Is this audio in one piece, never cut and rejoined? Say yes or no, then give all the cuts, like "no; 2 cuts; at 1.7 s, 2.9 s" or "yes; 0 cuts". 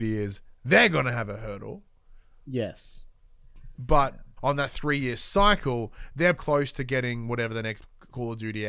no; 2 cuts; at 4.4 s, 6.4 s